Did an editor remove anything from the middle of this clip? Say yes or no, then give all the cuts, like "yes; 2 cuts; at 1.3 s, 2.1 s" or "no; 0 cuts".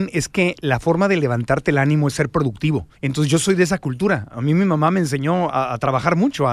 yes; 1 cut; at 2.9 s